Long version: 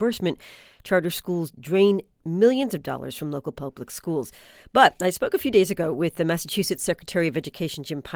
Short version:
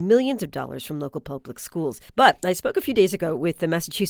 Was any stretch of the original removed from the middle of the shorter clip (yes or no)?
yes